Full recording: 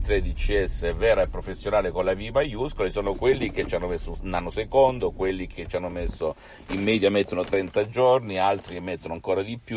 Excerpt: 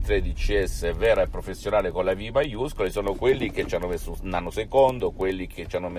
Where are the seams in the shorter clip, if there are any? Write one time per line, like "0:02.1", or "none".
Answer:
none

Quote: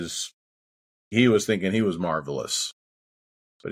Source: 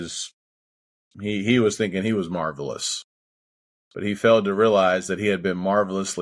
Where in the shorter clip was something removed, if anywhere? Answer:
0:01.1

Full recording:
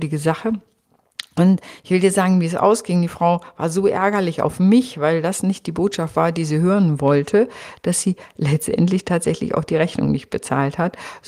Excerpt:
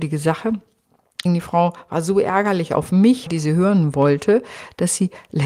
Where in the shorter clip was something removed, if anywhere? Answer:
0:01.3
0:03.3

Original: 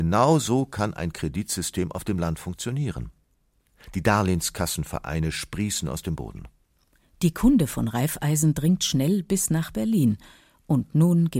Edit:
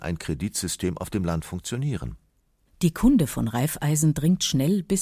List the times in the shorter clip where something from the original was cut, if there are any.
0:02.7

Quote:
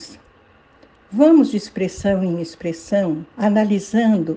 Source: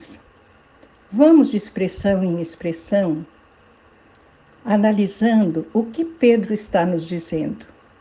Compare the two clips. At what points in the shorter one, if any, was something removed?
0:03.3

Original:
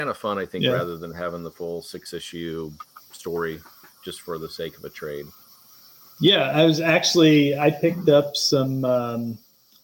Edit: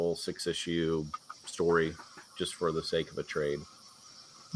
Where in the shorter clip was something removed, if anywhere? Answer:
none

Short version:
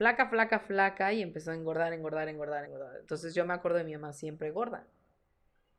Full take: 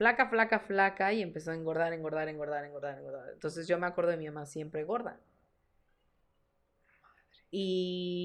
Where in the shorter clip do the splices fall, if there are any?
0:02.7

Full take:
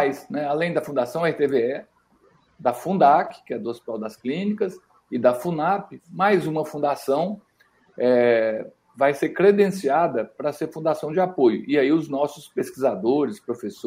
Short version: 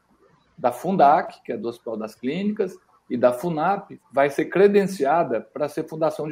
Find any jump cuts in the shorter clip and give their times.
0:04.0

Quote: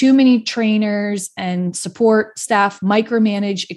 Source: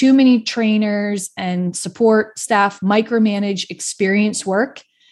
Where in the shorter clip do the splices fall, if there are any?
none

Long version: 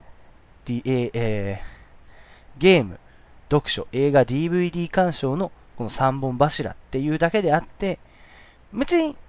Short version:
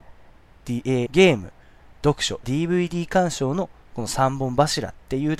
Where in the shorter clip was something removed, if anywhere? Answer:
0:01.1
0:02.4

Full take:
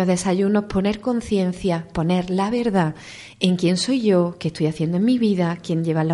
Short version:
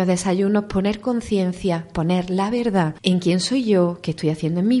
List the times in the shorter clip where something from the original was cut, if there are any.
0:03.0

